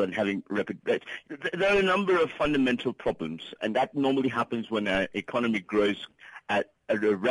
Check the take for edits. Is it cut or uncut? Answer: cut